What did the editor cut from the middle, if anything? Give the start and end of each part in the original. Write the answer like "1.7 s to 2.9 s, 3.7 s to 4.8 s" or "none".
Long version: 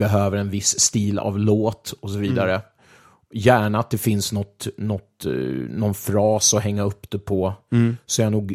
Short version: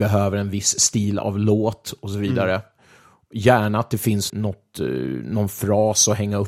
4.3 s to 4.8 s

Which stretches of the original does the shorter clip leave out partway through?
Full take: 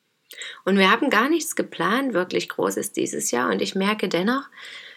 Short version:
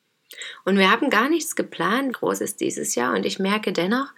2.1 s to 2.5 s

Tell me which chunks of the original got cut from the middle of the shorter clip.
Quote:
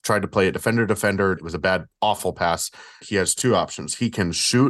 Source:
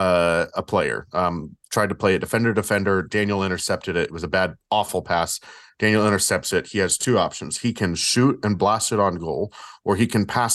3.0 s to 4.1 s, 5.7 s to 6.6 s

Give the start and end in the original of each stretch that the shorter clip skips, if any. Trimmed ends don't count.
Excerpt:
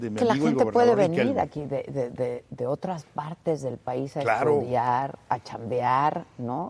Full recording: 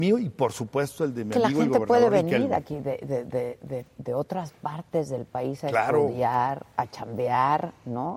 3.6 s to 3.9 s

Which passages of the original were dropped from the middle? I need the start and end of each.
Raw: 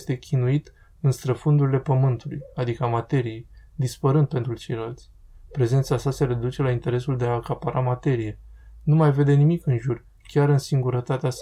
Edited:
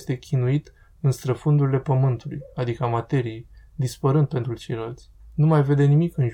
5.2 s to 8.7 s

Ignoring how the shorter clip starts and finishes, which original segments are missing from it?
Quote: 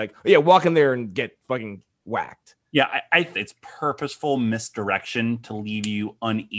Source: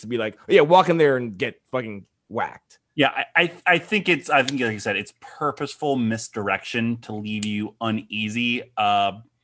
3.6 s to 4.9 s

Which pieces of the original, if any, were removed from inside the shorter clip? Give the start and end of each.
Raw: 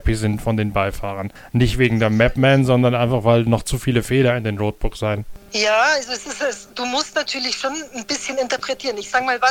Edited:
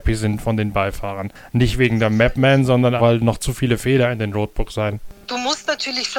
3.0 s to 3.2 s, 5.5 s to 6.7 s

